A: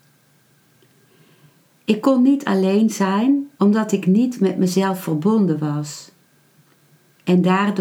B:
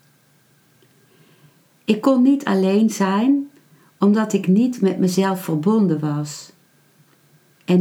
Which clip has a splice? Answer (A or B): A